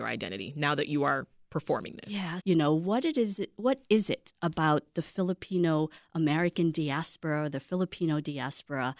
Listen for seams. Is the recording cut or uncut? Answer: cut